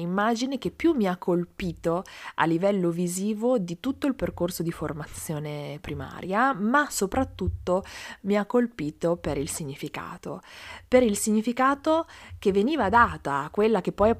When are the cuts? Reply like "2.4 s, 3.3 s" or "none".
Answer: none